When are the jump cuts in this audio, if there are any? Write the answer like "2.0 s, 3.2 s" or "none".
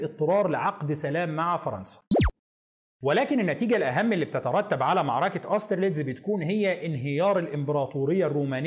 none

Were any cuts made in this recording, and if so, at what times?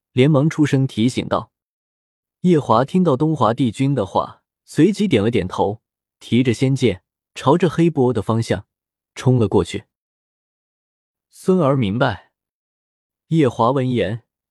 4.6 s, 10.5 s

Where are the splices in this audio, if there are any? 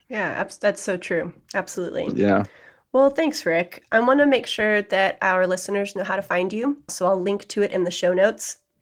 6.9 s

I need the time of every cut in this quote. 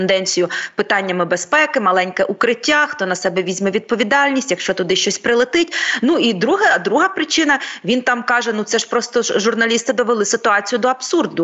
none

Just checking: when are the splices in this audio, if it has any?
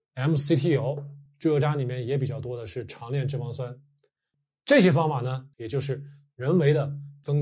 1.3 s, 5.5 s

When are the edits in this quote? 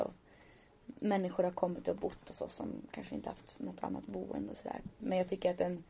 5.0 s

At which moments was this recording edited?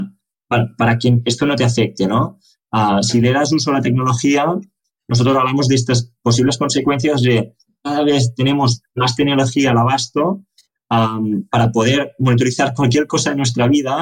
none

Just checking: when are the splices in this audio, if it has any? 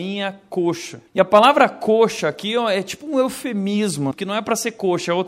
1.1 s, 4.1 s

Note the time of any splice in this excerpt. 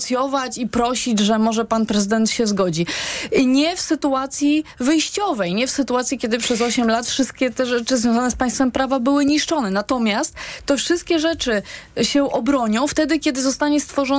none

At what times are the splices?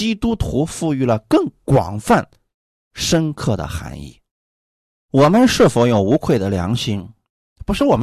none

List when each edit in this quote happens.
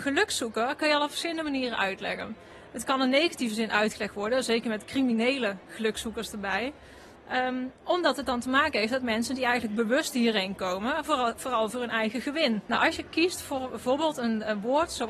12.7 s

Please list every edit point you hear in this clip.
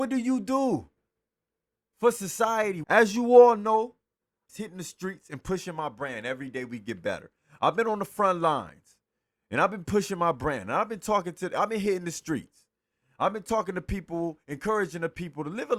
2.8 s, 4.5 s

